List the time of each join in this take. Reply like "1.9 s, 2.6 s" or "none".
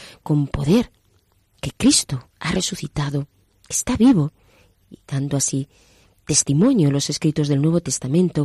none